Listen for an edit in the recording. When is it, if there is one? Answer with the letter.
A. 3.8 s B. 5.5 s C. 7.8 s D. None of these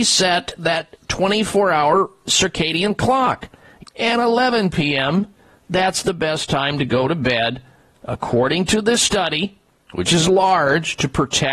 A